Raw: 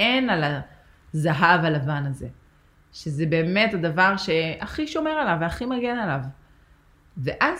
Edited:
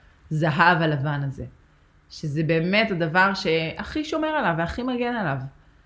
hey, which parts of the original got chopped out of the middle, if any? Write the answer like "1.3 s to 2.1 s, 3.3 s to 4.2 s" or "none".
none